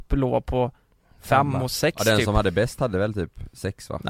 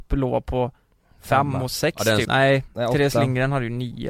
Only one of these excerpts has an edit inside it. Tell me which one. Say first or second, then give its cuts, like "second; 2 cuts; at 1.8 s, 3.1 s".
second; 1 cut; at 2.2 s